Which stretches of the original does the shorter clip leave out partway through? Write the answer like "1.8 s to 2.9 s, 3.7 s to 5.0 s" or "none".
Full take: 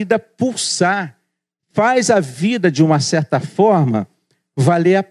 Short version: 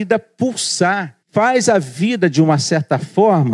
1.2 s to 1.6 s